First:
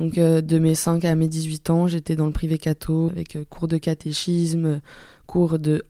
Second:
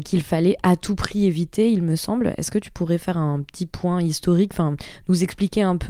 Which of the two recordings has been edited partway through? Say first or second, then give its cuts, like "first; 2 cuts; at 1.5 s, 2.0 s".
first; 1 cut; at 3.1 s